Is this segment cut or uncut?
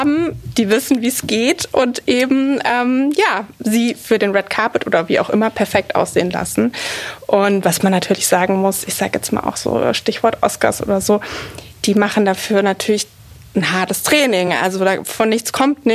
uncut